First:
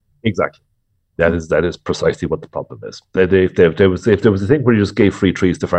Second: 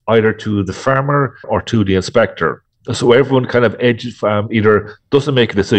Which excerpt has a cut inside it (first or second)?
second